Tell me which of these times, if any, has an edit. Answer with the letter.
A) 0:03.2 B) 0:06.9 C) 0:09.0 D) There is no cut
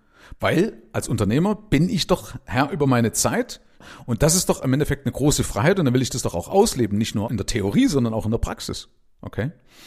D